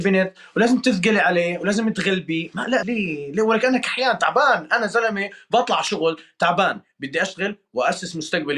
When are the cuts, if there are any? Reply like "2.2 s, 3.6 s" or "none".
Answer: 2.8 s